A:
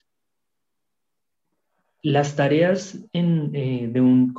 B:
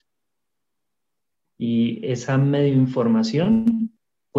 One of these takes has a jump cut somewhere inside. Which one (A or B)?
B